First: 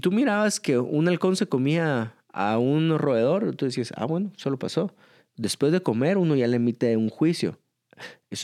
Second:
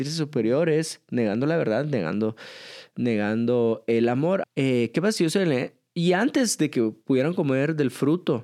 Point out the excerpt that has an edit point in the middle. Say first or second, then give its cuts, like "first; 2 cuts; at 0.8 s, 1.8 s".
second; 1 cut; at 4.4 s